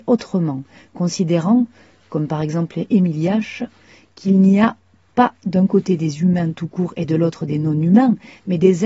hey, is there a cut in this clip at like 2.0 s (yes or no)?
no